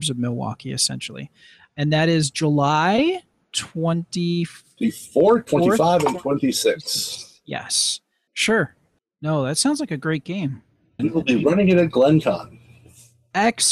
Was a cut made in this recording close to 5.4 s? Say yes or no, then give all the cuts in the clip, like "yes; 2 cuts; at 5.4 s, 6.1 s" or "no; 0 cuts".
no; 2 cuts; at 8.3 s, 11.0 s